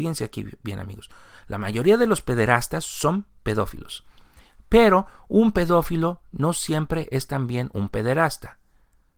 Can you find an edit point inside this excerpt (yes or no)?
no